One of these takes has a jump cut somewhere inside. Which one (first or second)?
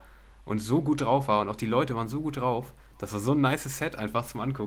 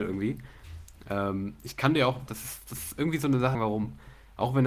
second